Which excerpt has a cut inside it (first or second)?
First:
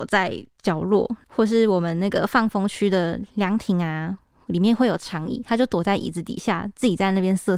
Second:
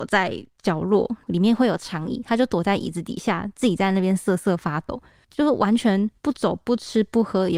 second